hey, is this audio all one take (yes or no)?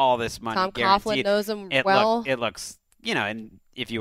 yes